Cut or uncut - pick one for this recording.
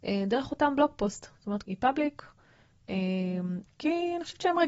cut